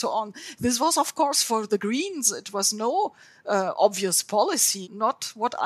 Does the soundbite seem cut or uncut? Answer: uncut